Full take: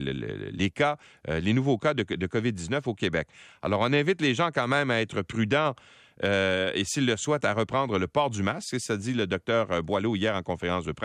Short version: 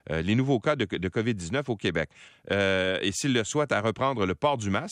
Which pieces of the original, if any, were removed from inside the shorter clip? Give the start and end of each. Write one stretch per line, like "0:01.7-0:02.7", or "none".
0:03.5-0:06.0